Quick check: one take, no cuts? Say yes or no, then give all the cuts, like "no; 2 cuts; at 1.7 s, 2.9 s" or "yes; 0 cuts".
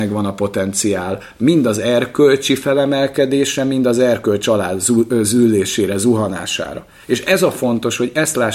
yes; 0 cuts